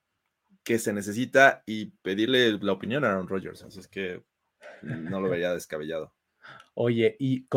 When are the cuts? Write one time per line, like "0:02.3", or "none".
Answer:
0:06.6